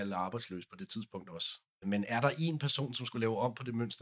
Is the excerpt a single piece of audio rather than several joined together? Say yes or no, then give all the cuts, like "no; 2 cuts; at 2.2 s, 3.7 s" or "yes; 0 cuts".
no; 1 cut; at 1.8 s